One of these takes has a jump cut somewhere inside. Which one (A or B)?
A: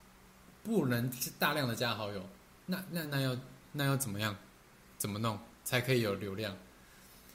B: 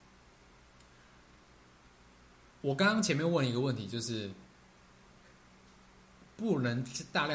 A